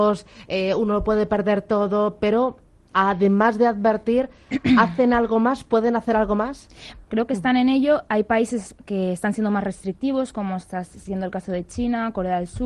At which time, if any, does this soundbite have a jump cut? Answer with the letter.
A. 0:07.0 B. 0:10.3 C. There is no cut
A